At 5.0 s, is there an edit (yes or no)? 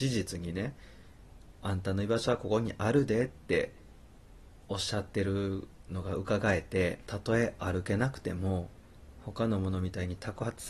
no